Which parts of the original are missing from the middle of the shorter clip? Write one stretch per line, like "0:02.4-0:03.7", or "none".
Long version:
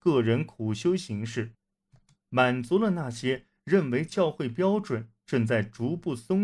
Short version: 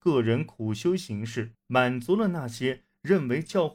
0:01.6-0:02.2